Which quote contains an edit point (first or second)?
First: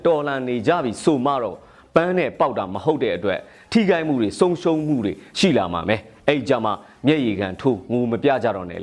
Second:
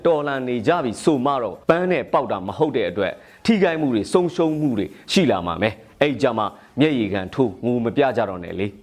second